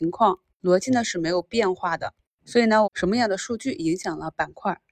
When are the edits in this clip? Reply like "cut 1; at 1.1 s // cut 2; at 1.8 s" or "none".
cut 1; at 2.8 s